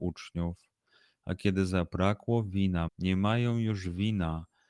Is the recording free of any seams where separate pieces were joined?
no; 1 cut; at 2.9 s

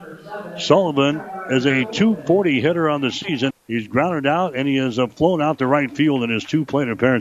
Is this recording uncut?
no; 1 cut; at 3.5 s

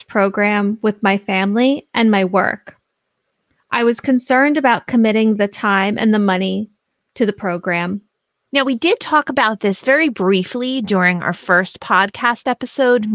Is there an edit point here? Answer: yes; 1 cut; at 8.4 s

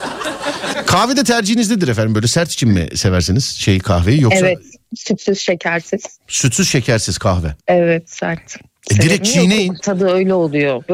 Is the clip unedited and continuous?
no; 2 cuts; at 7.6 s, 9.8 s

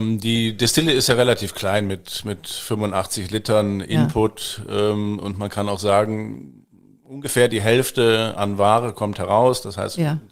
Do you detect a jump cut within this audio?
no; 0 cuts

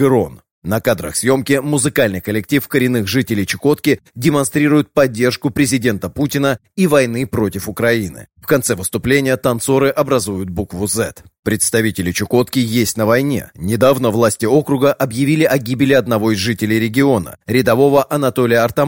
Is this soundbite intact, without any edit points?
yes; 0 cuts

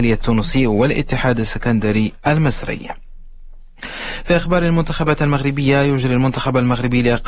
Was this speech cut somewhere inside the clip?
yes; 1 cut; at 4.2 s

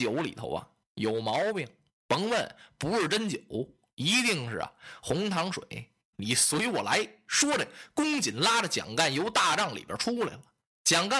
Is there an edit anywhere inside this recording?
yes; 1 cut; at 6.1 s

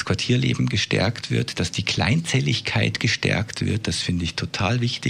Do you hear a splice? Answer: no; 0 cuts

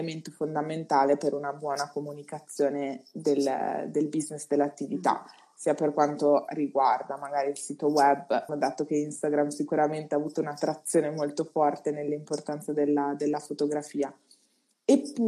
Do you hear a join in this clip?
yes; 1 cut; at 8.5 s

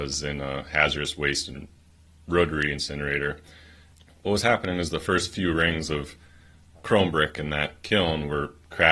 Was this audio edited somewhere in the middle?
no; 0 cuts

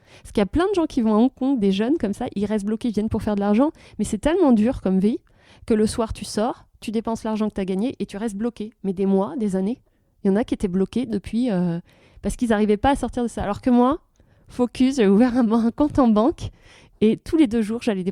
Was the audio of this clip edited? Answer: no; 0 cuts

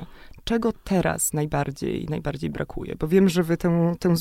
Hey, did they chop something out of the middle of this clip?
no; 0 cuts

